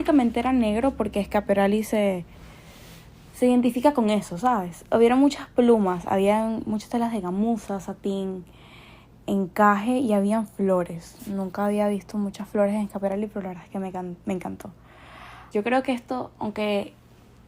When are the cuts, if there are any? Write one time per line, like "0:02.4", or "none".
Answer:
0:15.5